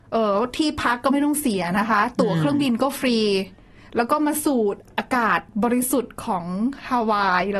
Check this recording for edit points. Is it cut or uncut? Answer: uncut